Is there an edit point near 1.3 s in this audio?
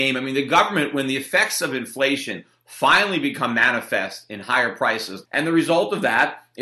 no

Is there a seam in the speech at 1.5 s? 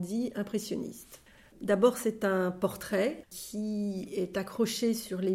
yes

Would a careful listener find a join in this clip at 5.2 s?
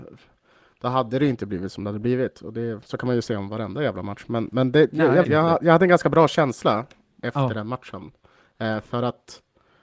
yes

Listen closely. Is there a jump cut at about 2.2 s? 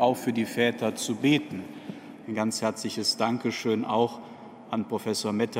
yes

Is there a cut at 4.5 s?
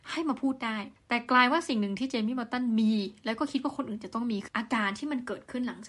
yes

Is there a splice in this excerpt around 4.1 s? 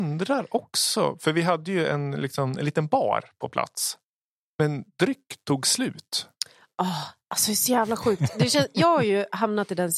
no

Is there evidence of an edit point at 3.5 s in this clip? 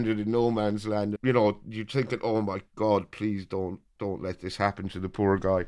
no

